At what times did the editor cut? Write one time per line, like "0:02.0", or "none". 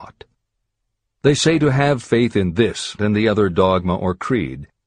0:01.1
0:03.0